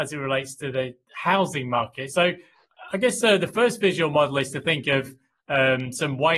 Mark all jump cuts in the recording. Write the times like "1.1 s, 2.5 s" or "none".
none